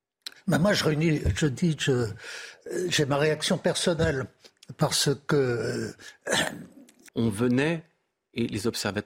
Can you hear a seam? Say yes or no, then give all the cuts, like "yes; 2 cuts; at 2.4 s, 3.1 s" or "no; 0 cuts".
yes; 1 cut; at 7.1 s